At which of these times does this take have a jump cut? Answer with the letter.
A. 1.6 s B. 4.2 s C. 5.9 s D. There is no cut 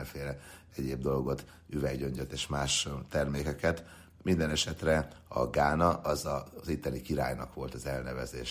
D